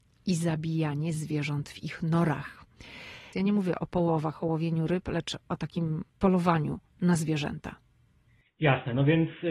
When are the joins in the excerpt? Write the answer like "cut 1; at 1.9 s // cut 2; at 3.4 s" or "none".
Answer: cut 1; at 3.3 s // cut 2; at 6.1 s